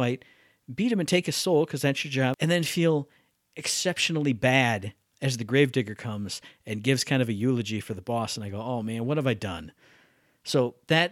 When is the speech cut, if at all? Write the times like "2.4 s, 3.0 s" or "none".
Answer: none